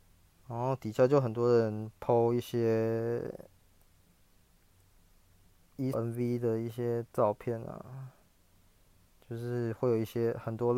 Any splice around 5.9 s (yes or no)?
yes